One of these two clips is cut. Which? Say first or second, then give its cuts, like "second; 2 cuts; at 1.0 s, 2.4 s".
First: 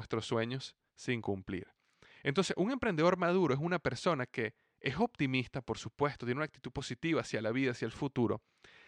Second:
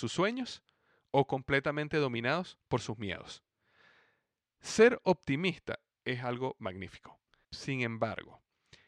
second; 1 cut; at 7.4 s